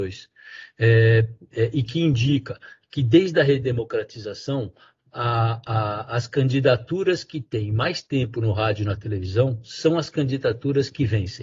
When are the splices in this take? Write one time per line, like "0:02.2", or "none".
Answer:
none